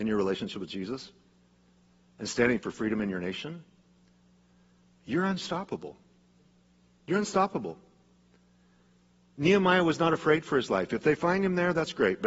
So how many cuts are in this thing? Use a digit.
0